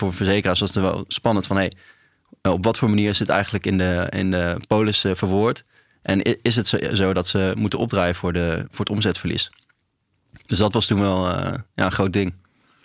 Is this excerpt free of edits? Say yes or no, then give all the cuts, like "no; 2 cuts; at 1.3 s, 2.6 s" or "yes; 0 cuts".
yes; 0 cuts